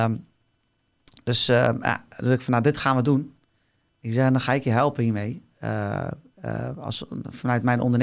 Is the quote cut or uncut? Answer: uncut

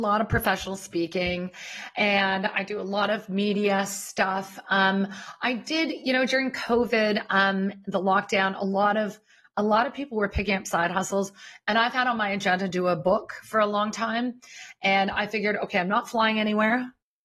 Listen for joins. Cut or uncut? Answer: uncut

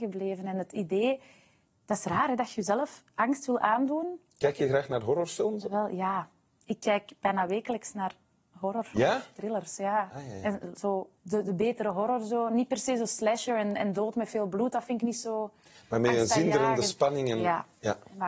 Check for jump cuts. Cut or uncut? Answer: cut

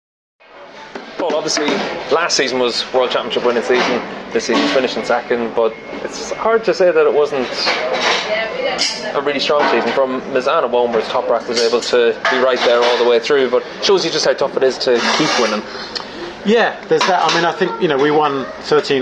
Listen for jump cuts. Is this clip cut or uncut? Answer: uncut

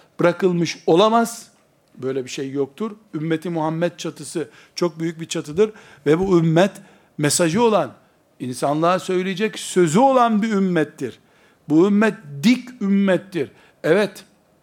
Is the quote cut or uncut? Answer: uncut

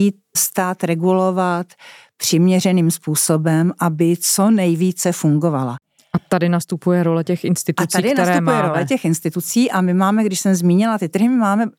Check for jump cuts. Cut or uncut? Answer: uncut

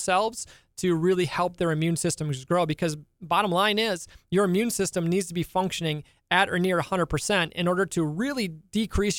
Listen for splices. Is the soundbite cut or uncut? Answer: uncut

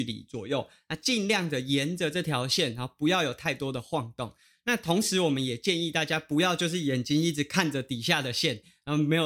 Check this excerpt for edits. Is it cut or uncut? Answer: uncut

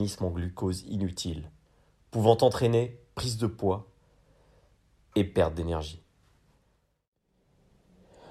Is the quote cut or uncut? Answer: uncut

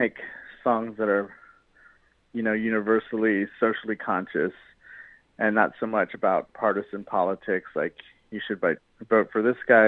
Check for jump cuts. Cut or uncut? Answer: uncut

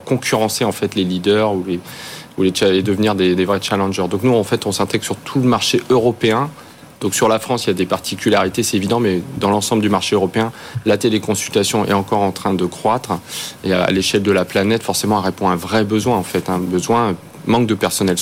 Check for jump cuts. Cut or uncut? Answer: uncut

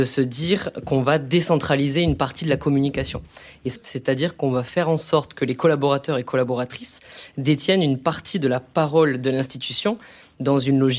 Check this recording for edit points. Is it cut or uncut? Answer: cut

